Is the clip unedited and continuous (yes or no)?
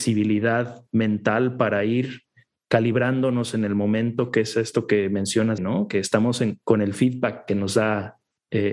no